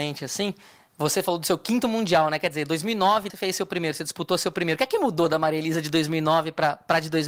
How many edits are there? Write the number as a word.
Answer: one